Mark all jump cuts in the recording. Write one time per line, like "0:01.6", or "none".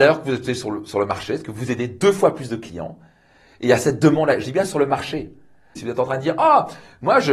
0:05.8